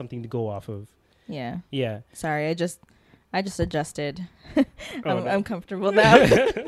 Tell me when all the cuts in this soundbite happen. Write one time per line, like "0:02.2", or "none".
none

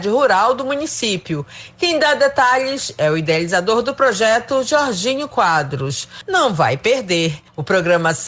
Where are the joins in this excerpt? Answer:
none

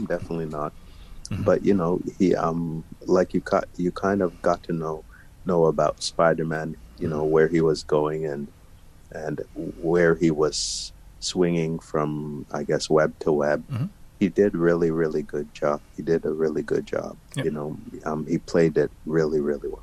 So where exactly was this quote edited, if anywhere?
0:17.2

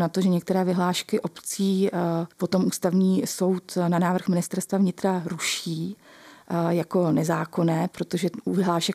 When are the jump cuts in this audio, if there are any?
0:02.3

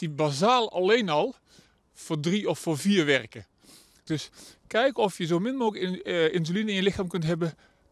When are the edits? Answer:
0:04.1

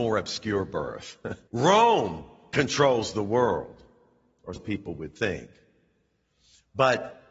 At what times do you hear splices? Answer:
0:01.5
0:04.6

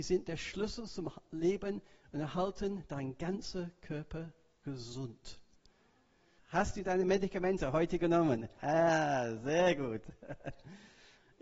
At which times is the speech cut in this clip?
0:06.4
0:08.6

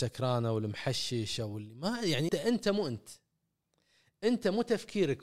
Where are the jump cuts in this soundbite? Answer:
0:02.3

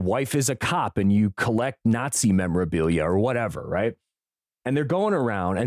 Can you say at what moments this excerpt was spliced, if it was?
none

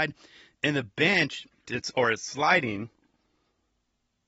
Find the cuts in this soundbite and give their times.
0:01.6

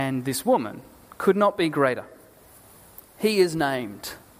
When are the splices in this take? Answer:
none

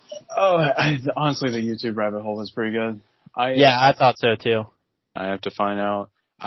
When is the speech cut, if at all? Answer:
0:05.2

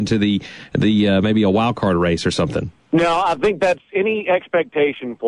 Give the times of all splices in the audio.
0:02.8

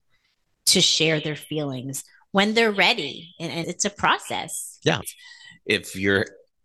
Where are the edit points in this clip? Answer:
0:03.6
0:05.0

